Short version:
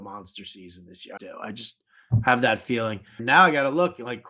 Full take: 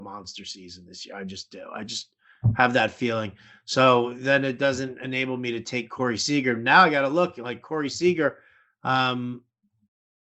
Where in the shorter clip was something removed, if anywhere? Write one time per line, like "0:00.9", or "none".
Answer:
0:01.2
0:03.2

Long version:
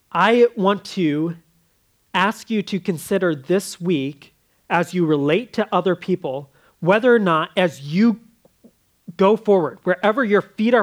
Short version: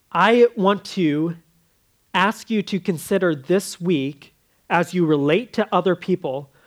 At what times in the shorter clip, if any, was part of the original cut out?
none

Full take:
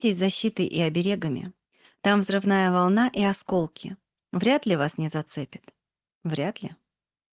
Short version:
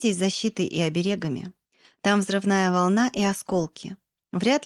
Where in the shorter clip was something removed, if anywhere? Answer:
none

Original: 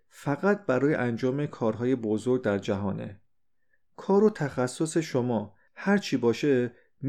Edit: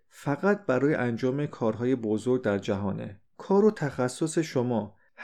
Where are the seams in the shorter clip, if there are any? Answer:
0:03.3

